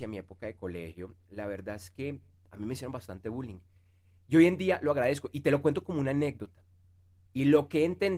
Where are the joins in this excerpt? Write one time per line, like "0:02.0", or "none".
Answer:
0:07.3